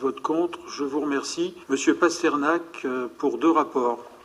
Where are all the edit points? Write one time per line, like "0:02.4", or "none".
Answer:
0:01.6